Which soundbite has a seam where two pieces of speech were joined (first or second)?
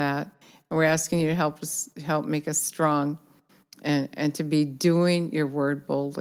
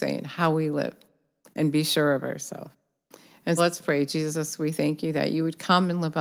second